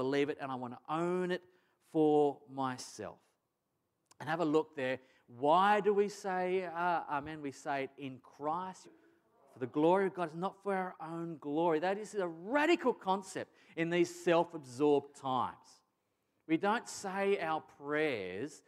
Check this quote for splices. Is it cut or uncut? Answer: cut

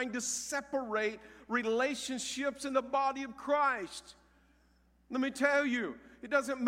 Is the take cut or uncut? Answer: uncut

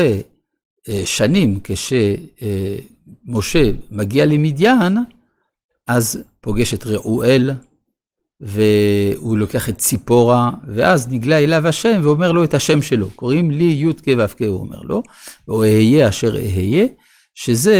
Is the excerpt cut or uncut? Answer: uncut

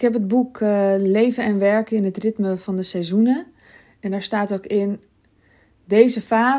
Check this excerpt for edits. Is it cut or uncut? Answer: uncut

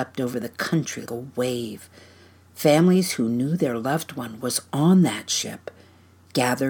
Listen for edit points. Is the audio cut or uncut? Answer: cut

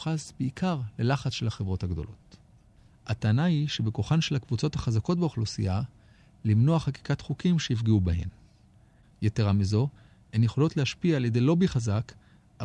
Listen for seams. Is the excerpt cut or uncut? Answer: cut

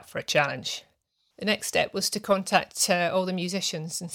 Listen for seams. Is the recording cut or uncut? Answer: cut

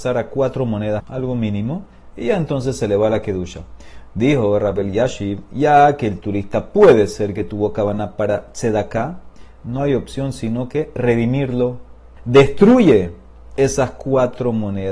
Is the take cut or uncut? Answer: cut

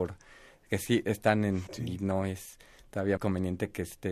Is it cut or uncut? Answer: cut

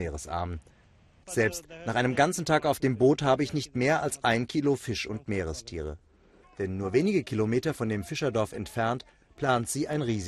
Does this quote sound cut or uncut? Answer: cut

